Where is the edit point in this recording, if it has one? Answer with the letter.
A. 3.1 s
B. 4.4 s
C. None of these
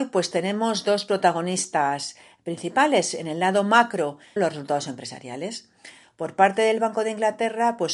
B